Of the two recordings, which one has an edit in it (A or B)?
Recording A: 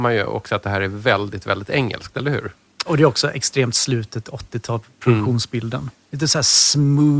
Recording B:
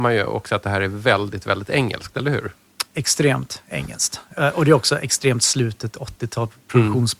A